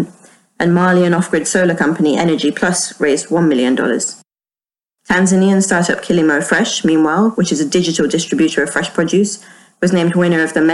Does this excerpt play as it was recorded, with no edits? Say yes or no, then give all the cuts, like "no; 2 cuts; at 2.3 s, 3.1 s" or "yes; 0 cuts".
yes; 0 cuts